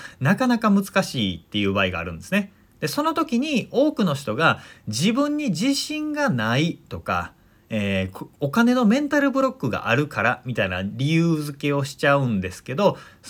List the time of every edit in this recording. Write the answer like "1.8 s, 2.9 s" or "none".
none

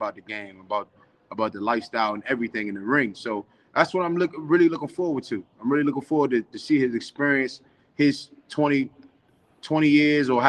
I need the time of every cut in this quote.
none

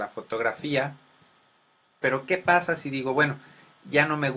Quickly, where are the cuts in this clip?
2.0 s

